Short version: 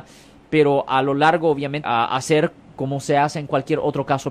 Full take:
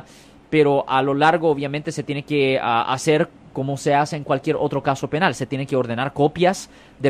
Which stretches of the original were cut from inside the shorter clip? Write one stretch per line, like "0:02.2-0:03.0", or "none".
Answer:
0:01.8-0:02.6